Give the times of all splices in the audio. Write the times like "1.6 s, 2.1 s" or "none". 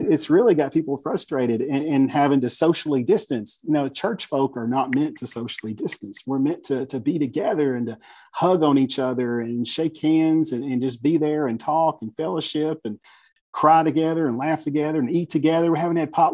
none